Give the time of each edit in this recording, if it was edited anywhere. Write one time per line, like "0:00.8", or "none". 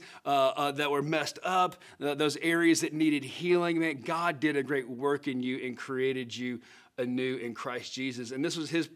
none